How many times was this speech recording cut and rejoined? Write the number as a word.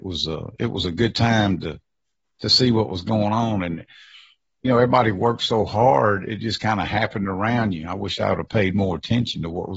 zero